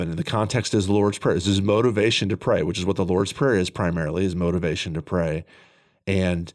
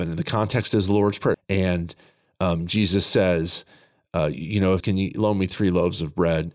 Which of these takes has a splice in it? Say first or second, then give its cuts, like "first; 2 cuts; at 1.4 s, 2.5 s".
second; 2 cuts; at 1.3 s, 4.8 s